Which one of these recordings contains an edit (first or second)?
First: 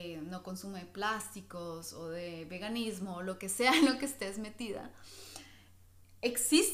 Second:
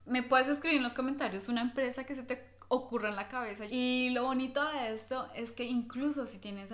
second